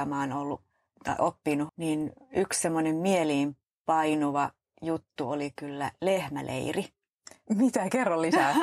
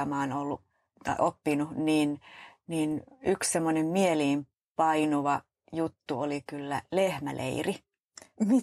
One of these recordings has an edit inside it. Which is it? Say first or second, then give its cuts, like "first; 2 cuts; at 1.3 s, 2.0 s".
first; 1 cut; at 1.7 s